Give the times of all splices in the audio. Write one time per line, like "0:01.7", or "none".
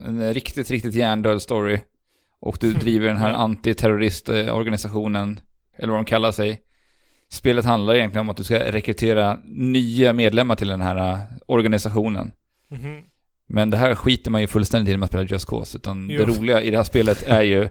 0:05.7